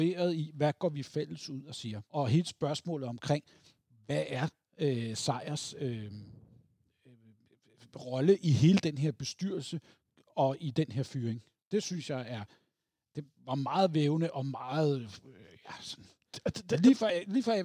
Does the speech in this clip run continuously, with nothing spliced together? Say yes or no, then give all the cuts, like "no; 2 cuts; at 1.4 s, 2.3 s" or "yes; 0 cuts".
no; 1 cut; at 2.1 s